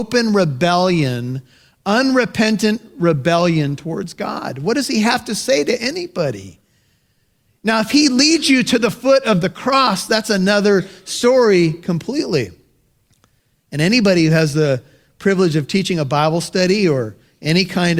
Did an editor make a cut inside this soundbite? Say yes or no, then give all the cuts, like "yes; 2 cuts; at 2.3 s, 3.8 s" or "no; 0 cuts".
no; 0 cuts